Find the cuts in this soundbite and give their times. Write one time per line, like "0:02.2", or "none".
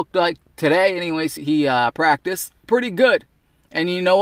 0:01.4
0:02.6